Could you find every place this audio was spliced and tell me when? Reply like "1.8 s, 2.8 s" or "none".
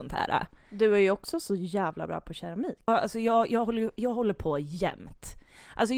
2.9 s